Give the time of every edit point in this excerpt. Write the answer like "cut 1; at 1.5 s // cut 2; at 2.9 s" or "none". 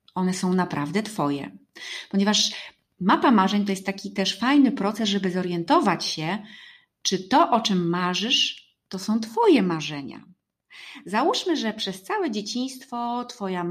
none